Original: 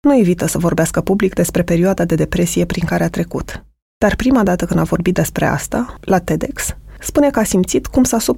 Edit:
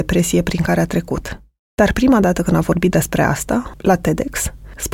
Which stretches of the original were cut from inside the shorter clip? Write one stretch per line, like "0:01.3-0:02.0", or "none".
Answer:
none